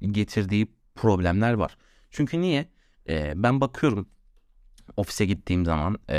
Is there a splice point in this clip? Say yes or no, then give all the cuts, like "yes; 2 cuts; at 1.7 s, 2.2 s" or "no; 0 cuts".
no; 0 cuts